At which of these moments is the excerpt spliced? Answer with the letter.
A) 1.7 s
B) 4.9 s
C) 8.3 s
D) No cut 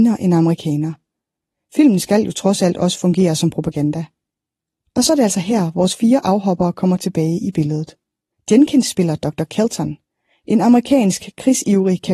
C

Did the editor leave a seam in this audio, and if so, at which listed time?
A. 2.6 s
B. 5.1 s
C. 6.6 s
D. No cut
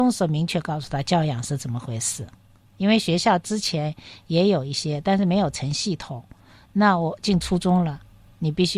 D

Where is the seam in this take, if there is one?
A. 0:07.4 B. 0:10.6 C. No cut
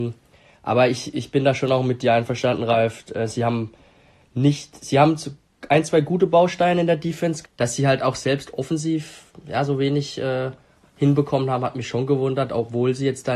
A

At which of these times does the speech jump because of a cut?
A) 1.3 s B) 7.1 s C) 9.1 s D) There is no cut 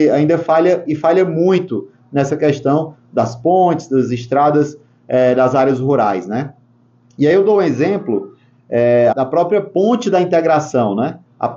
C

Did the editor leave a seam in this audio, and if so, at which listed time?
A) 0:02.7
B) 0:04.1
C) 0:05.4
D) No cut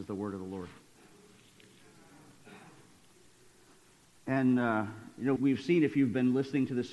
C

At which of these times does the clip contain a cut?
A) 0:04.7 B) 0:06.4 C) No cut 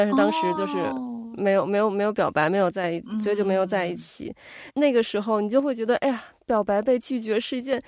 A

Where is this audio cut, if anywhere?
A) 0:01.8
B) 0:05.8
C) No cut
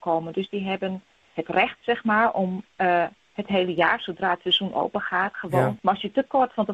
B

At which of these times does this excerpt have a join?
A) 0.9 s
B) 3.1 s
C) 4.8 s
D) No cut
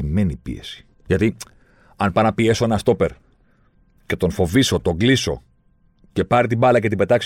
A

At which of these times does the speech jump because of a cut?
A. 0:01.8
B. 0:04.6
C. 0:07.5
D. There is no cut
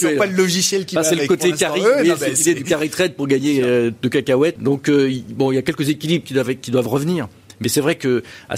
B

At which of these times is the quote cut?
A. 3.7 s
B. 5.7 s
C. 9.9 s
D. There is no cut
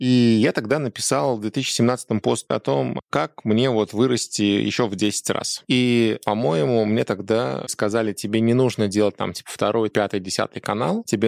C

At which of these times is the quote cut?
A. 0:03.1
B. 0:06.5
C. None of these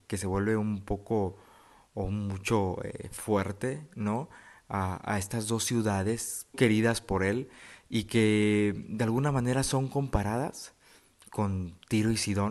B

